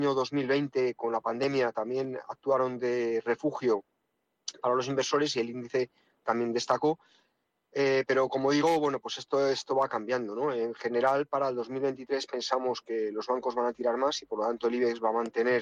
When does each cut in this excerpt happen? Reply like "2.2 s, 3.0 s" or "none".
none